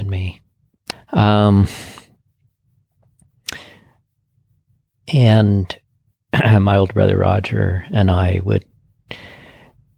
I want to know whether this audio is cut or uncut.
cut